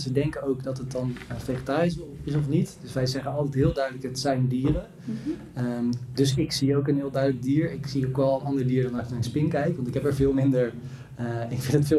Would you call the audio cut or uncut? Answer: uncut